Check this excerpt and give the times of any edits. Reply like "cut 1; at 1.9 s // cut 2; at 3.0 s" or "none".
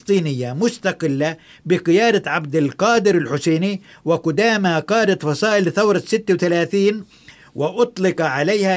none